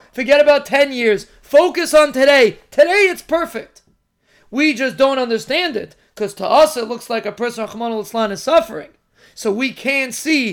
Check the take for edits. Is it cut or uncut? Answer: uncut